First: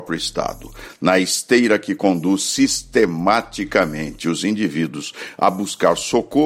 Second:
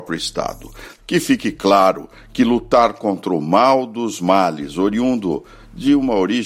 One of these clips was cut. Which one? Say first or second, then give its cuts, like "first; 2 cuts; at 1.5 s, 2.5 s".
second; 1 cut; at 1.0 s